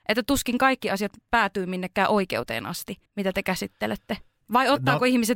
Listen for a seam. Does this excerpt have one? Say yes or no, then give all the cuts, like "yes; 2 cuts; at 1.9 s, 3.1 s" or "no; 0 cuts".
yes; 1 cut; at 3.1 s